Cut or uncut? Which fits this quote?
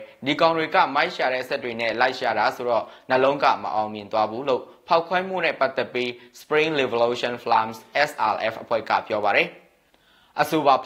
uncut